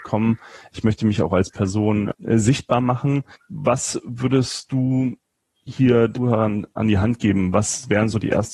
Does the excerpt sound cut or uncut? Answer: uncut